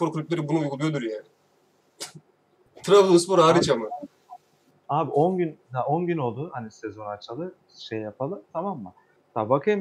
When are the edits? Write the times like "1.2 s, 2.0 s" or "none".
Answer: none